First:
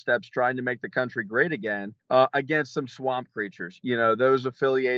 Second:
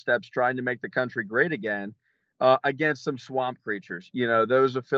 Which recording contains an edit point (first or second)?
first